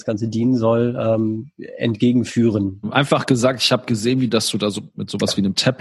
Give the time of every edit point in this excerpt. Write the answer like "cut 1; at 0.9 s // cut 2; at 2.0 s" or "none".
cut 1; at 2.8 s